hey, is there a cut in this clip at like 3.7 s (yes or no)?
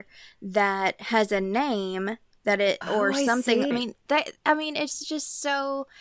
yes